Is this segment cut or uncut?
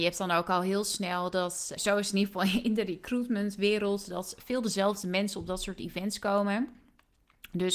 cut